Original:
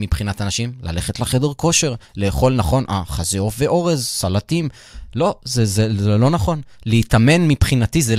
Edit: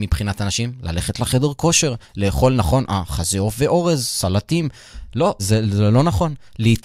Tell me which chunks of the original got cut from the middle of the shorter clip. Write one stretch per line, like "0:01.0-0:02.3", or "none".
0:05.4-0:05.7